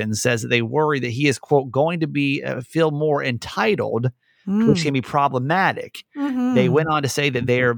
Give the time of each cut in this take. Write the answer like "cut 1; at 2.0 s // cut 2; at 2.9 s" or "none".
none

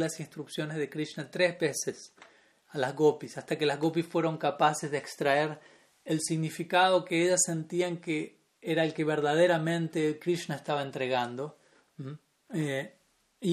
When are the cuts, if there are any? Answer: cut 1; at 12.3 s

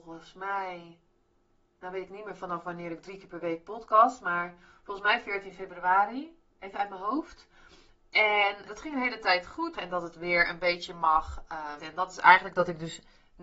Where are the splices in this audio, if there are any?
cut 1; at 8.7 s // cut 2; at 9.7 s // cut 3; at 11.8 s

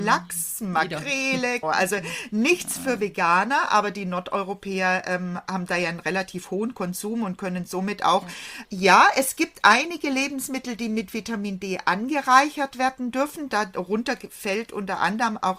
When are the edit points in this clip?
cut 1; at 1.6 s // cut 2; at 8.6 s

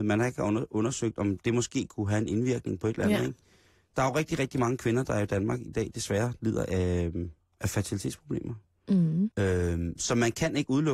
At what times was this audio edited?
cut 1; at 9.3 s

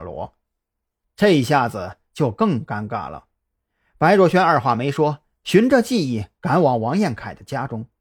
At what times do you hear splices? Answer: none

